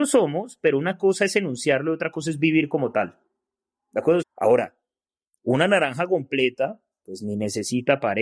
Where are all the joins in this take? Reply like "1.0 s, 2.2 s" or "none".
4.2 s